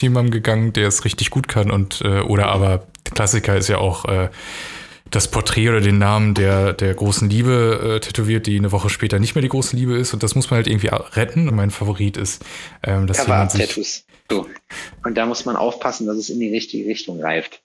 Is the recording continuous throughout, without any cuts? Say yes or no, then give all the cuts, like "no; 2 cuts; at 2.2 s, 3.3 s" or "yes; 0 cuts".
no; 2 cuts; at 11.5 s, 14.3 s